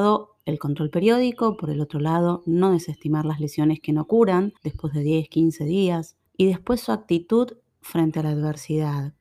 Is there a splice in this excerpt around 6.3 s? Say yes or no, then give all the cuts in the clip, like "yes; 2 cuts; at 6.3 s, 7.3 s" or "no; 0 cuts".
yes; 2 cuts; at 4.6 s, 6.3 s